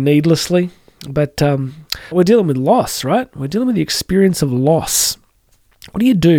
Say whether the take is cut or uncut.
cut